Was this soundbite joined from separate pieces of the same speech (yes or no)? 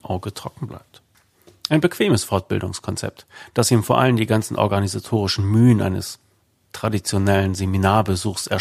no